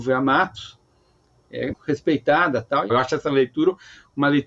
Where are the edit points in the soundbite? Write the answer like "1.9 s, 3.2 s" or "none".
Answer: 1.7 s, 2.9 s